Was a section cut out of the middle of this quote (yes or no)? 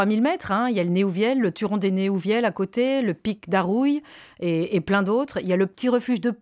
no